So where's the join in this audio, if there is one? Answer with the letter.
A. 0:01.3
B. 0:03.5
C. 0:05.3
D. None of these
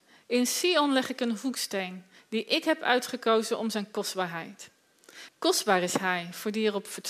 C